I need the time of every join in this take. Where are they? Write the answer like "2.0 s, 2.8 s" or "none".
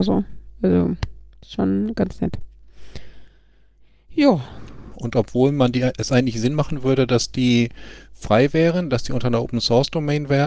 4.9 s